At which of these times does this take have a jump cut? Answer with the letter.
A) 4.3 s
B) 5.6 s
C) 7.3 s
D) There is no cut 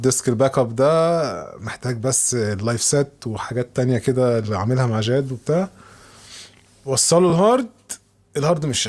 D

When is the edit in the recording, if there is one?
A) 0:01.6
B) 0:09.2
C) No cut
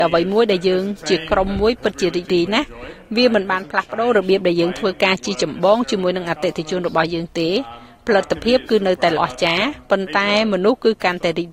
B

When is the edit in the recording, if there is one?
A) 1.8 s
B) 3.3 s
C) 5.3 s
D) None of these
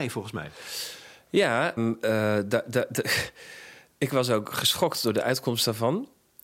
A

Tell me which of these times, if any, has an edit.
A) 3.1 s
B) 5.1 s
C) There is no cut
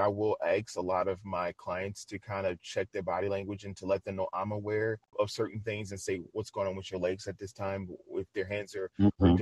B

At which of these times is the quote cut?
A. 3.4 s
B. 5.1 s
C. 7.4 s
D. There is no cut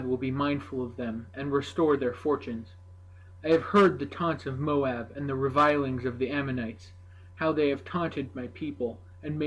D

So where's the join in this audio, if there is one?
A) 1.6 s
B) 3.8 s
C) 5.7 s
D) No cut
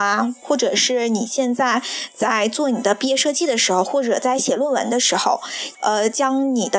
C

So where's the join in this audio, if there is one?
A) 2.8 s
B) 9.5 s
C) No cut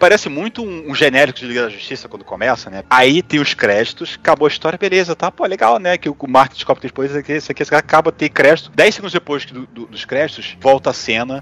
A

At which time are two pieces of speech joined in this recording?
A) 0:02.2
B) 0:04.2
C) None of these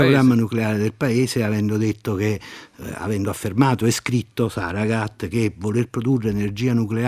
C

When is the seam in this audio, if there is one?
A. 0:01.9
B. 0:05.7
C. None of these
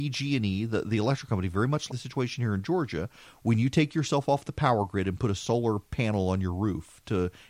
A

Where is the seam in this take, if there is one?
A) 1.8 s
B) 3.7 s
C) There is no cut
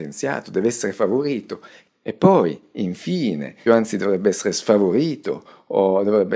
B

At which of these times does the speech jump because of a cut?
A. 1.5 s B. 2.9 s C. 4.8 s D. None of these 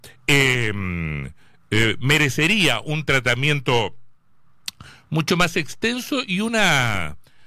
D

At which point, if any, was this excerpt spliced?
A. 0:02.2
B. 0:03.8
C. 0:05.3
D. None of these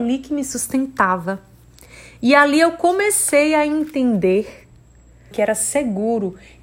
C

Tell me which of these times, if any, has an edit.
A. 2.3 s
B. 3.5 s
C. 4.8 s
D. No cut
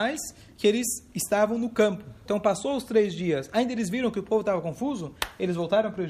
A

